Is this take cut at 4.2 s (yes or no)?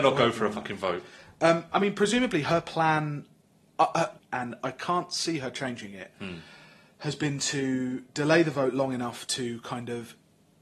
yes